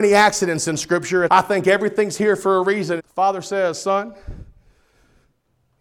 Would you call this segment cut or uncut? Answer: cut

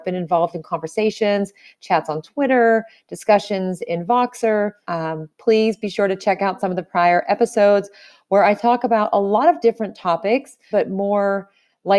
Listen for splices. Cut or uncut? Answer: cut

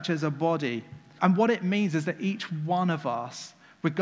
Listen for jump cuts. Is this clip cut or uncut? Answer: cut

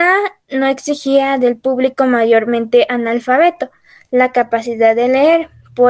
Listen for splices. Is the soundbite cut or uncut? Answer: uncut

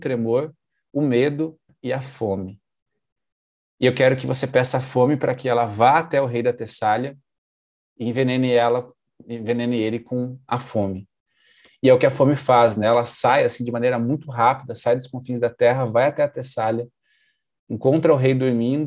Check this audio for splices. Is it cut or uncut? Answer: uncut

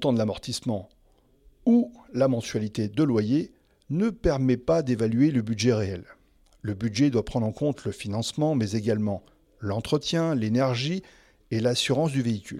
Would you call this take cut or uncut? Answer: uncut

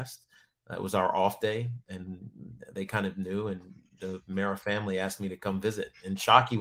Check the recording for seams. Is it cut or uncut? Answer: uncut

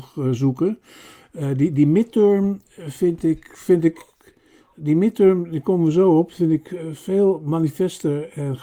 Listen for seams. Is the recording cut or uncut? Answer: uncut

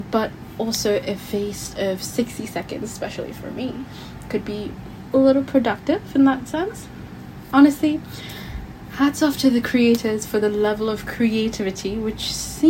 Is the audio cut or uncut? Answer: uncut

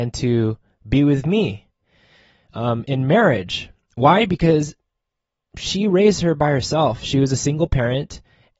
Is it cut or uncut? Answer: uncut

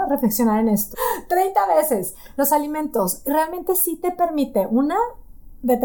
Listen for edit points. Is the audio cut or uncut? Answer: cut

